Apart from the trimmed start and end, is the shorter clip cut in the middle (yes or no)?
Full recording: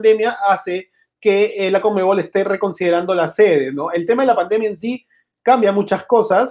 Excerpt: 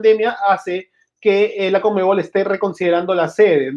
no